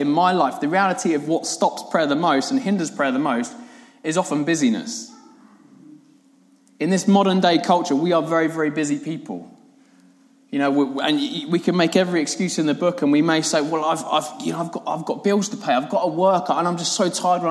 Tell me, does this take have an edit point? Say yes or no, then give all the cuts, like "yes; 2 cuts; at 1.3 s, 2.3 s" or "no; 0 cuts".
no; 0 cuts